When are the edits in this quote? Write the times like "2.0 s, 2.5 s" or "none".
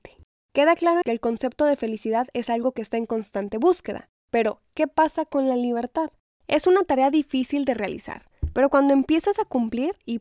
1.0 s, 6.3 s